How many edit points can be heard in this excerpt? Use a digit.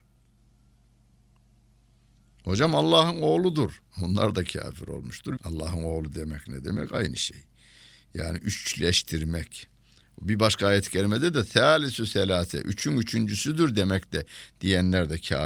1